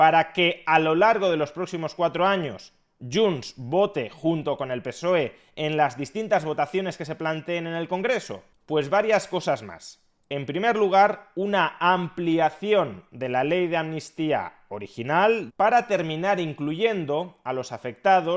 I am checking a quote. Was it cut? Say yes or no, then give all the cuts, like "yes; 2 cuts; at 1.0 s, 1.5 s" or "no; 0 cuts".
yes; 1 cut; at 15.5 s